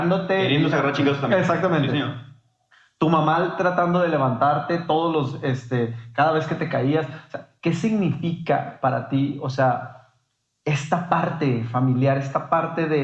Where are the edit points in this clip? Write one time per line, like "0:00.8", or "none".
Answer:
none